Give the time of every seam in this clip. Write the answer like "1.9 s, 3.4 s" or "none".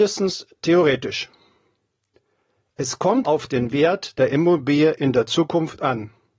3.2 s